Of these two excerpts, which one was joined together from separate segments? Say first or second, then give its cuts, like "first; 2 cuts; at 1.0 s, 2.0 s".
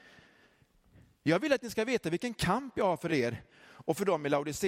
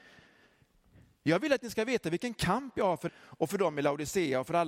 second; 1 cut; at 3.1 s